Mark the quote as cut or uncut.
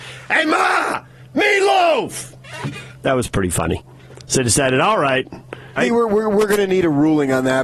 cut